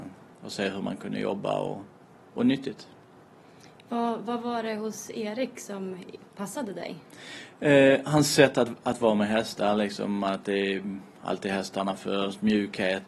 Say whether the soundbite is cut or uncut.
uncut